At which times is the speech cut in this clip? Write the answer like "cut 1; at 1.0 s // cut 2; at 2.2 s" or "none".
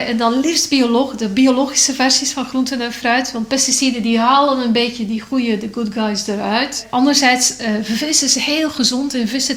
none